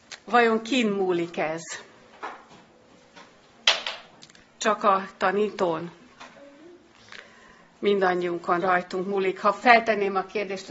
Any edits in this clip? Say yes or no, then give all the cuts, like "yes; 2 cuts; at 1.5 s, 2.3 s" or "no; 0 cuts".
no; 0 cuts